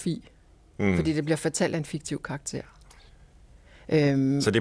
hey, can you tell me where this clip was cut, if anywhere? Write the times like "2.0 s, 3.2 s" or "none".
none